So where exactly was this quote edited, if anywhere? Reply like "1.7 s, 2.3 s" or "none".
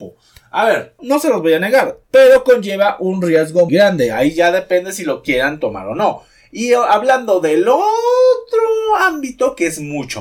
1.0 s, 2.0 s, 3.7 s